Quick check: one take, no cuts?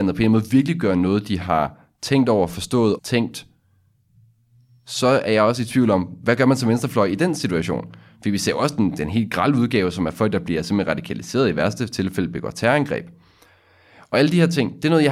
no; 1 cut; at 3.0 s

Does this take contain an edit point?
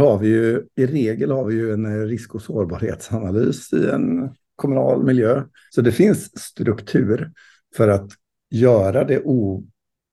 yes; 1 cut; at 5.7 s

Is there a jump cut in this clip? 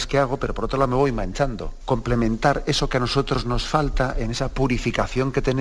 yes; 1 cut; at 1.8 s

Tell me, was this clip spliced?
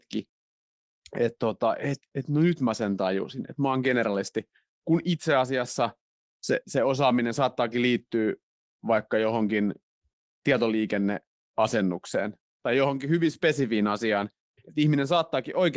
no; 0 cuts

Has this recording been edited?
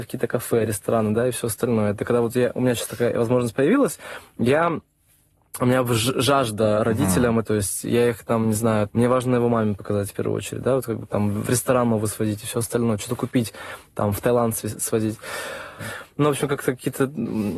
yes; 3 cuts; at 7.4 s, 8.9 s, 15.8 s

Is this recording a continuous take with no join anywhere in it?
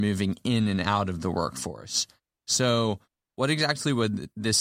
yes; 0 cuts

